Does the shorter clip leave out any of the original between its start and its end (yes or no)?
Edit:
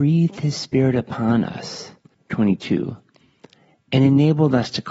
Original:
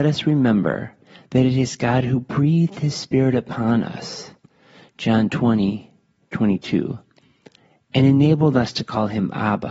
yes